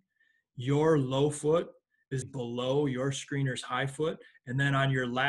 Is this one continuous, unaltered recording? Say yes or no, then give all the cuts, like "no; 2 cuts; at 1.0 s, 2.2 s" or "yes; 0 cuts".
no; 1 cut; at 2.2 s